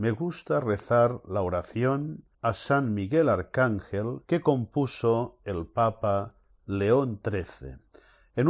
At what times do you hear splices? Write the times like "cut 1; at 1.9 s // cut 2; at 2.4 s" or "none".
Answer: cut 1; at 2.3 s // cut 2; at 4.2 s